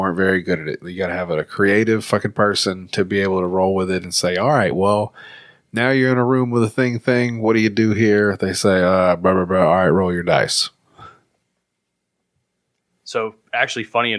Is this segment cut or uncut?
uncut